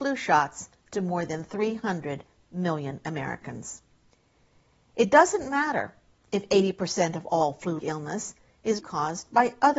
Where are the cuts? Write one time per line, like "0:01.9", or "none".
0:07.8
0:08.8

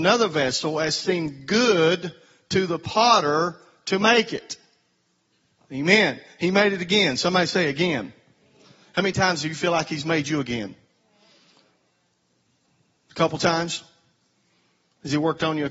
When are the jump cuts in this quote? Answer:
none

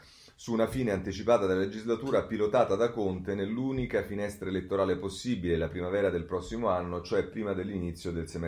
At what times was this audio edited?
none

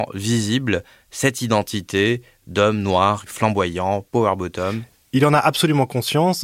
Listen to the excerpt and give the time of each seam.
0:03.3

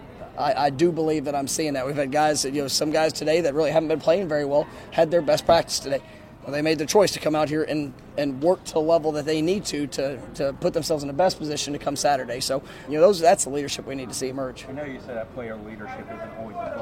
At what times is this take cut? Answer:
0:12.9
0:14.7

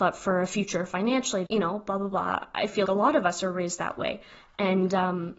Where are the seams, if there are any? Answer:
0:01.4
0:02.8

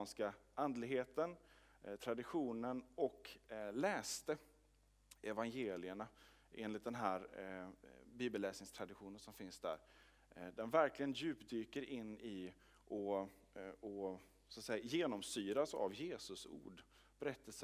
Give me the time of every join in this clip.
none

